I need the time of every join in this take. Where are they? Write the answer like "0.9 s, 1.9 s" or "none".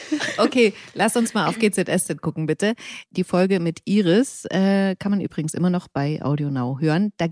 3.1 s